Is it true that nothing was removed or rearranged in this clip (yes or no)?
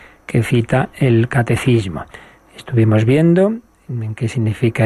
yes